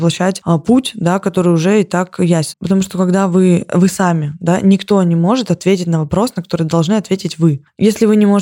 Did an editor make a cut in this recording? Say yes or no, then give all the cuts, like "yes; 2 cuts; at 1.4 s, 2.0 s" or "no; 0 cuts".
yes; 1 cut; at 2.5 s